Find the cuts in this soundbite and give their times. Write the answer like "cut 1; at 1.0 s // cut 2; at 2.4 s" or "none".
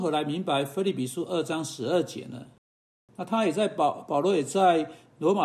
cut 1; at 2.9 s